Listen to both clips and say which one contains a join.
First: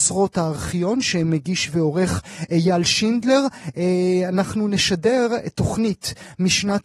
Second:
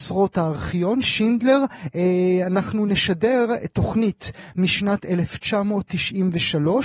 second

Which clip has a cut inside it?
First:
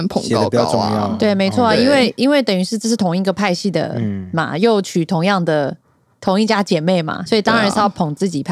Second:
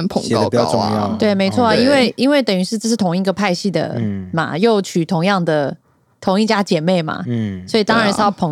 first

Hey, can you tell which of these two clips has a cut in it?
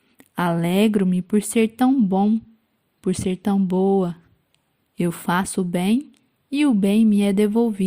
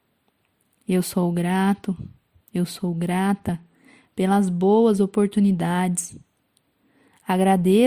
first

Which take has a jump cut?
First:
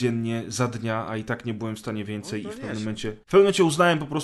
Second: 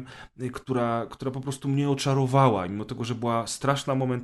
first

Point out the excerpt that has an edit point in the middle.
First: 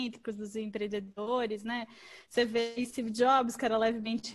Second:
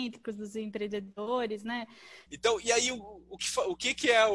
second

